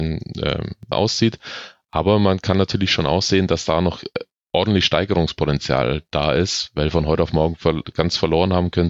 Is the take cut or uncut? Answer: cut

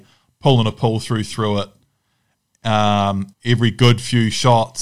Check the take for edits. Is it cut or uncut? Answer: cut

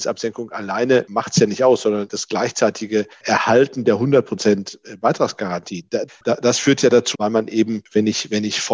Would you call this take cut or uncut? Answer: cut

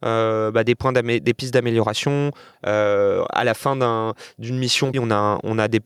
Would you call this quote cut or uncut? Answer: cut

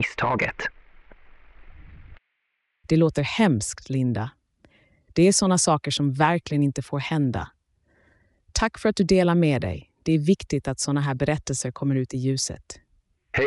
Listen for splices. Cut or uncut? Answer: uncut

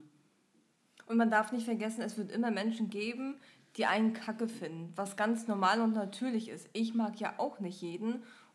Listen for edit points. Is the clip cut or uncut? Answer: uncut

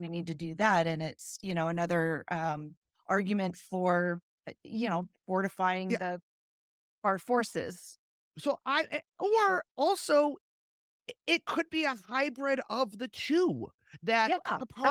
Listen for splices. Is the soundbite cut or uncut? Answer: uncut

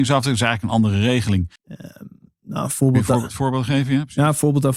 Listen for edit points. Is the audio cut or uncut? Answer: cut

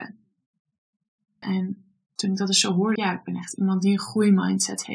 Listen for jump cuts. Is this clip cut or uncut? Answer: cut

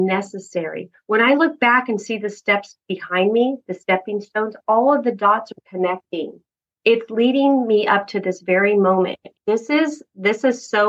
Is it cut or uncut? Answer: cut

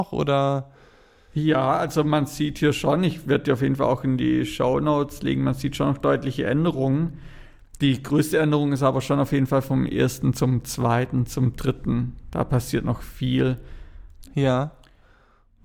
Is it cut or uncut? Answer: cut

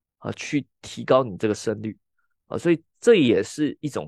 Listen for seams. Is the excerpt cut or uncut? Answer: uncut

